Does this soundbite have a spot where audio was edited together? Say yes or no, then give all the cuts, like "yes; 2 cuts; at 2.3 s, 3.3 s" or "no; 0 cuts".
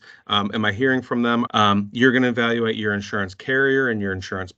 yes; 1 cut; at 1.5 s